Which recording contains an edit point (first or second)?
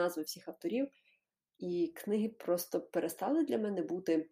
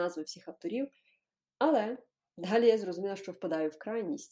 first